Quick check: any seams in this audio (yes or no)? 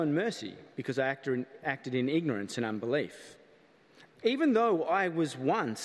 yes